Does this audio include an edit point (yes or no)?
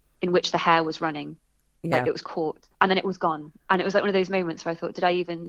no